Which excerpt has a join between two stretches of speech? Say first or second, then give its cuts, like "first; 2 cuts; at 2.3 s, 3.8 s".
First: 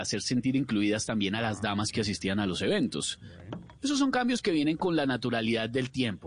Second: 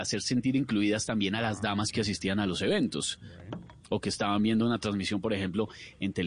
first; 1 cut; at 3.8 s